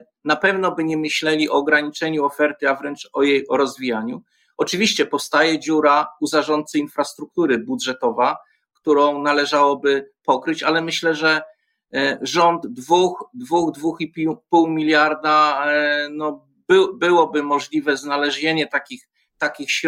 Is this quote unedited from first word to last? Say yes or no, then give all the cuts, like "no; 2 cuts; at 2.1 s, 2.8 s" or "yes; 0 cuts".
yes; 0 cuts